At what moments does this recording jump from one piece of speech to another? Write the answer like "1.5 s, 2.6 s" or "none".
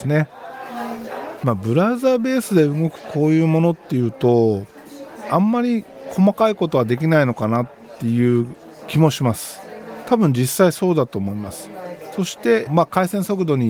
12.7 s